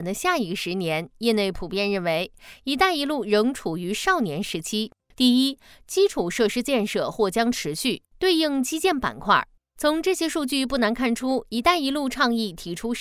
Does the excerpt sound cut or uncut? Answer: cut